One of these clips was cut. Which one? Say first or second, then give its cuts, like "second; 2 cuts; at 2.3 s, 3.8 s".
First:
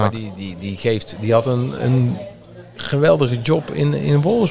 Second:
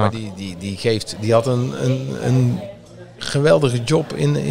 first; 1 cut; at 1.8 s